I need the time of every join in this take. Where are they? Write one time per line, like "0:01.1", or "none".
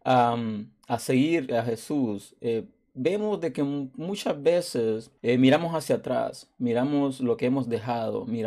0:05.2